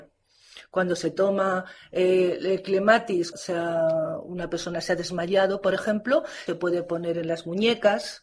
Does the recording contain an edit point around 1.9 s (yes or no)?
no